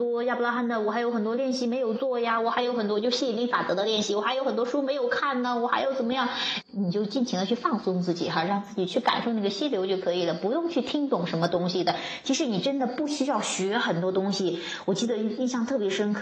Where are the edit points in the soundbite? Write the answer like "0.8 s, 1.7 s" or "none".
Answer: 6.6 s